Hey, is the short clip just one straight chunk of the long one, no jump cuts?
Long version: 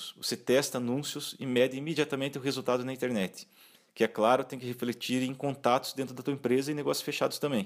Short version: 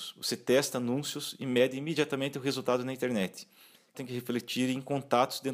no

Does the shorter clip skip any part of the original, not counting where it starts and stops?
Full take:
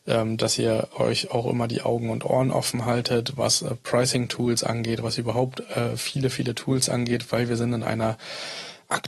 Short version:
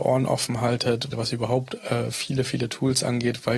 yes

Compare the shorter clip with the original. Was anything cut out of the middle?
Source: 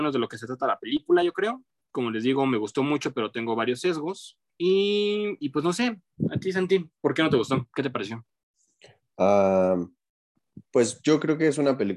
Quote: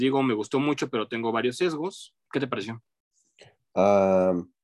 yes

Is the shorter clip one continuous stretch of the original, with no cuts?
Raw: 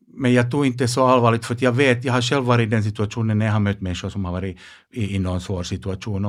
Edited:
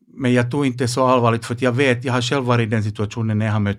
yes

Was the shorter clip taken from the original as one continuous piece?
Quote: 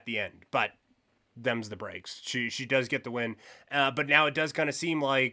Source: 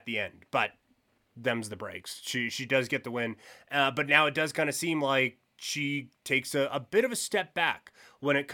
yes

